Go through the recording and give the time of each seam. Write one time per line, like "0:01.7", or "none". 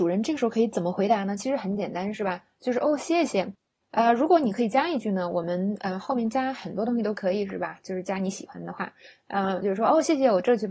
0:03.8
0:09.6